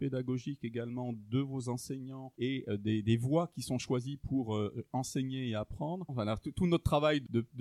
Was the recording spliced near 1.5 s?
no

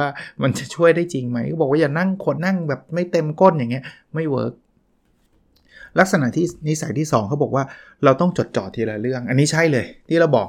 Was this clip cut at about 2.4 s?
yes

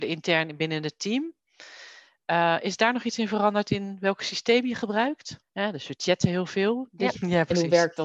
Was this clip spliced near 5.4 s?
yes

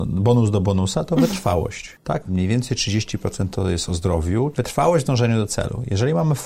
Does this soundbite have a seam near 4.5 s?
yes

